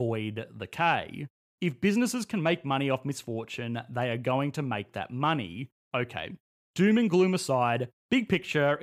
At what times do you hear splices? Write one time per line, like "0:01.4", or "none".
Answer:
0:01.5
0:05.8